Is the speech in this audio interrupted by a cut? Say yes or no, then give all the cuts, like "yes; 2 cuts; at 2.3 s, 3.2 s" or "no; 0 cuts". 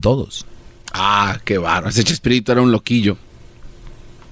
no; 0 cuts